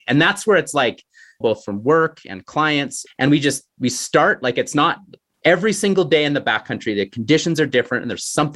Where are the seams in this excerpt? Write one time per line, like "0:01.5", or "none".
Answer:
0:01.4
0:03.1
0:05.3